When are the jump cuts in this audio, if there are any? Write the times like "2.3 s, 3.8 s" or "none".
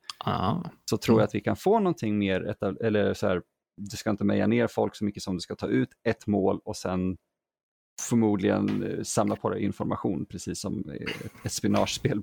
none